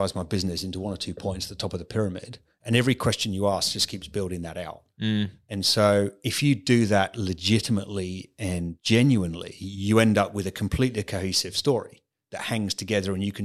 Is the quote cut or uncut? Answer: uncut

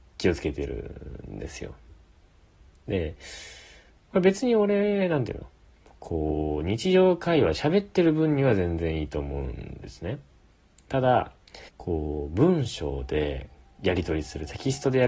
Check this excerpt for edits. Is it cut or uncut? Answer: cut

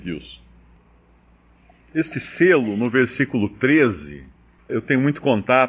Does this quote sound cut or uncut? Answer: cut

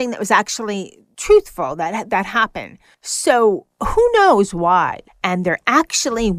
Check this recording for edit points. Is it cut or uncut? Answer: cut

